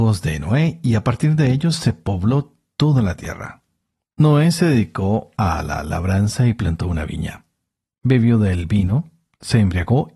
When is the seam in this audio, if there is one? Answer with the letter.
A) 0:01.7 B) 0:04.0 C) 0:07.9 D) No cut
D